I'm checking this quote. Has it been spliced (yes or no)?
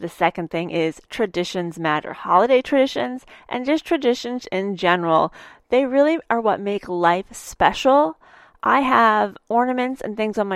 no